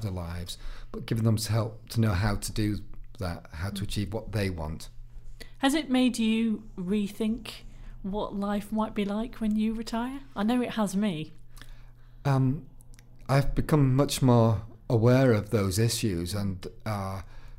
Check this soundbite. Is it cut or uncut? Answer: uncut